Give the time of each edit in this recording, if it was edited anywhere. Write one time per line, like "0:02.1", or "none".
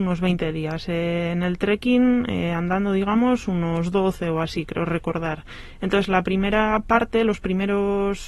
none